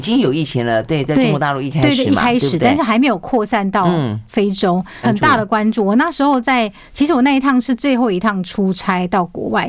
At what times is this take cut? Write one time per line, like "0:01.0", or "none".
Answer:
0:05.0